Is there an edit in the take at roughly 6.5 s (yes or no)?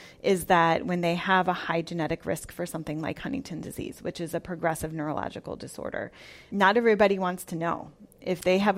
yes